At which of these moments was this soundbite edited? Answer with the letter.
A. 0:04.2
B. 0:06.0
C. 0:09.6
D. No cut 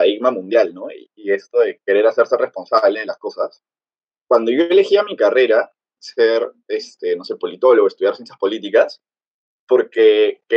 B